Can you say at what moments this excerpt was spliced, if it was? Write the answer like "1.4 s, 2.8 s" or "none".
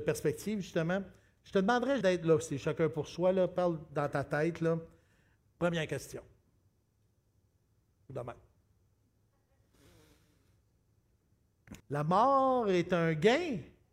2.0 s, 5.4 s, 11.8 s